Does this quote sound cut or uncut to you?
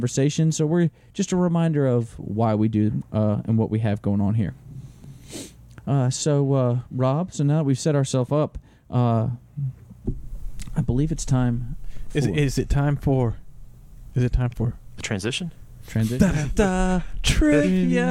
uncut